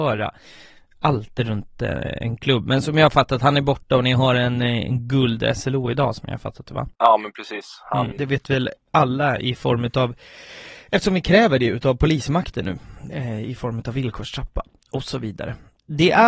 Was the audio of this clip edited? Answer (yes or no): yes